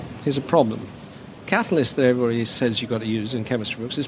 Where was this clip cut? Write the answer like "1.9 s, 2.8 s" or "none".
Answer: 1.4 s